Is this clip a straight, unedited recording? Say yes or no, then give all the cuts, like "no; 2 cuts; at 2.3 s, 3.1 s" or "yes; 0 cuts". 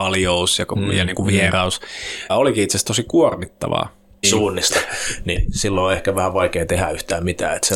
no; 2 cuts; at 2.3 s, 4.2 s